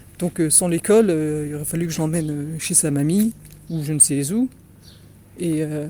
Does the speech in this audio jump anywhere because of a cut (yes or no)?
no